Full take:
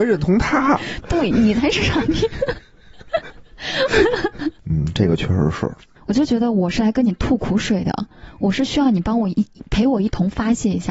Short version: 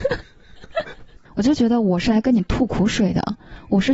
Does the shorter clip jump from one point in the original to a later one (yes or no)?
yes